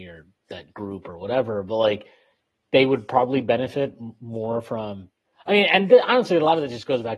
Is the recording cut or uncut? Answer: uncut